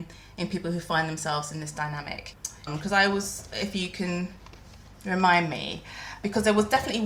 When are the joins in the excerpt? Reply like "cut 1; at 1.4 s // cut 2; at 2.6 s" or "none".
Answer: cut 1; at 2.7 s